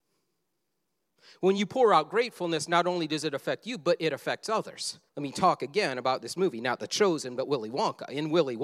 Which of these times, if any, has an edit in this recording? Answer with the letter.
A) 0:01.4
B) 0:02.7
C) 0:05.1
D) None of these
C